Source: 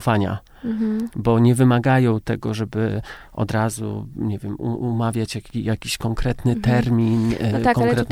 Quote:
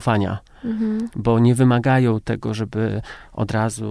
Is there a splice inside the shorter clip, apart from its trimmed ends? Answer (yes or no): no